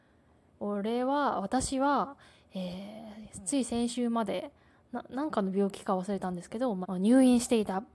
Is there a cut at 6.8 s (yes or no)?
yes